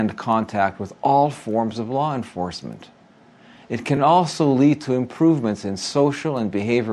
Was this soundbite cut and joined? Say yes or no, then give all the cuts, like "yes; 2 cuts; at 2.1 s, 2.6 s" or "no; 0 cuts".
no; 0 cuts